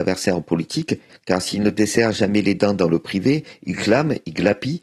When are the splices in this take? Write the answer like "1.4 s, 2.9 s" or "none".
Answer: 1.1 s

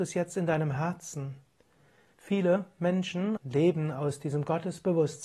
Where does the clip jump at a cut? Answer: 2.1 s, 3.4 s

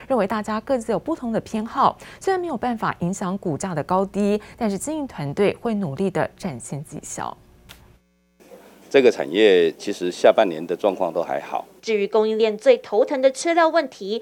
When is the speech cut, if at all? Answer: 11.8 s

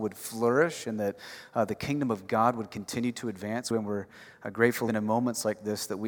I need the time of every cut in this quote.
3.7 s, 4.9 s

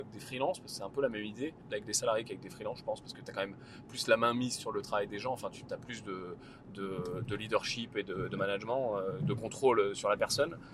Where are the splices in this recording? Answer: 1.6 s

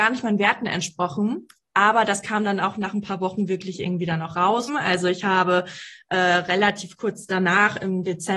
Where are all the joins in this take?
4.7 s

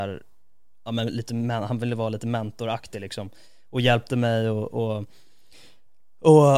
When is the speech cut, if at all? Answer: none

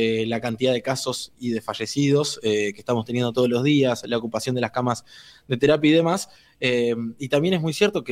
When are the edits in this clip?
none

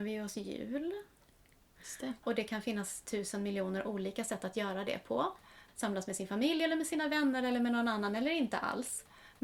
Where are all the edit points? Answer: 2.2 s

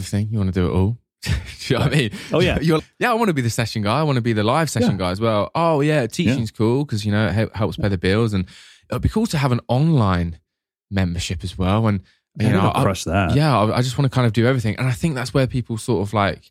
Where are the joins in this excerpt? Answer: 2.8 s

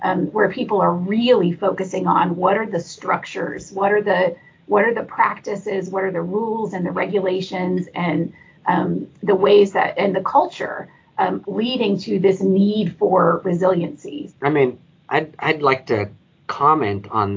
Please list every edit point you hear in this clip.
11.4 s, 14.3 s

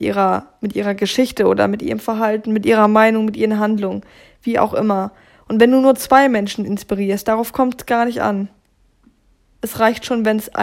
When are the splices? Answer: none

